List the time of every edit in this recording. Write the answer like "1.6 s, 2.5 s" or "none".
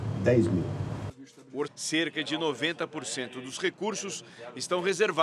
1.7 s